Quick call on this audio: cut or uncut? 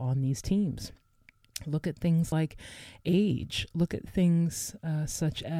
uncut